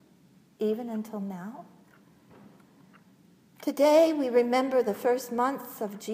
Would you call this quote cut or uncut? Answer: uncut